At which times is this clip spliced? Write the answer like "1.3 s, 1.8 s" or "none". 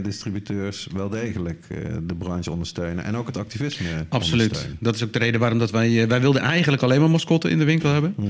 none